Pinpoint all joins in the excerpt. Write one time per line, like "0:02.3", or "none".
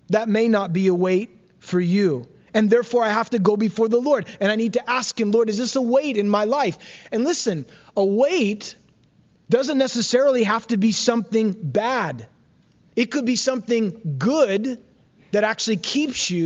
none